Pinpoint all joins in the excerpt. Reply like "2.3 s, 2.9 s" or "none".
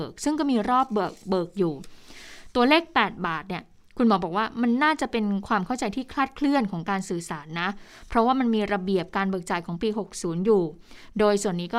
none